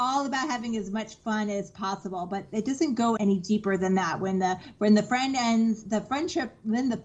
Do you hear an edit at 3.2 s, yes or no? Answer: yes